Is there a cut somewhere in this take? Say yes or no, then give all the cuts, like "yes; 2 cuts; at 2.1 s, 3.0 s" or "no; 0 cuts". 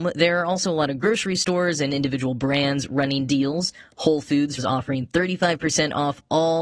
yes; 1 cut; at 4.6 s